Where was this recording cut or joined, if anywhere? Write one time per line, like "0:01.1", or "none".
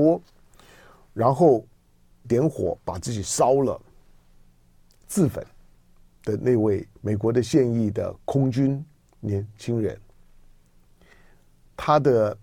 0:02.2
0:07.0